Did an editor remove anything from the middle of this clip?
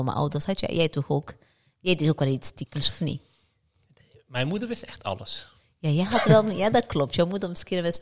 no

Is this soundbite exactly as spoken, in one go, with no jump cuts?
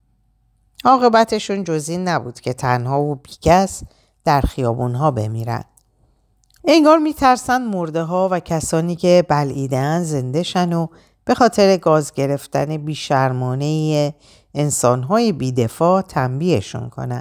no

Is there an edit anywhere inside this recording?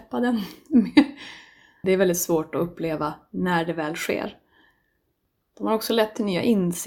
yes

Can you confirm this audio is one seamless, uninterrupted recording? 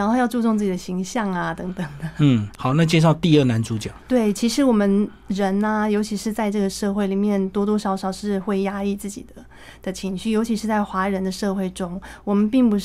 no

